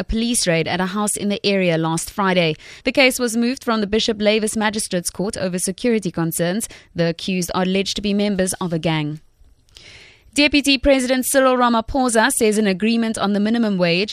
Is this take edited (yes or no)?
yes